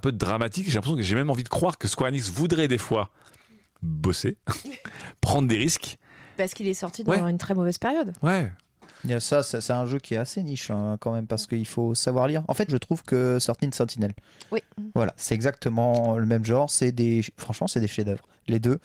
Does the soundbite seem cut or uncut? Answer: cut